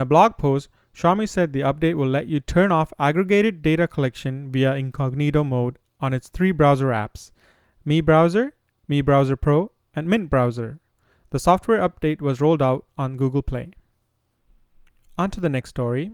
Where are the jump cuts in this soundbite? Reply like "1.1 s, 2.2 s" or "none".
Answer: none